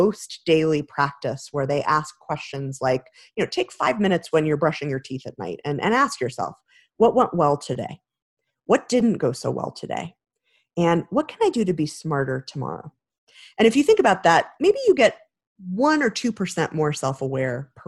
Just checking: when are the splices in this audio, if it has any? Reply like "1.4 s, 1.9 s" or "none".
none